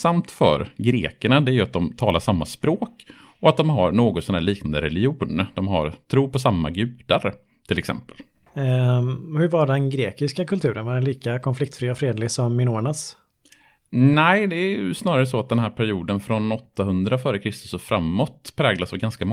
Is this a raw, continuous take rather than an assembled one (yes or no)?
yes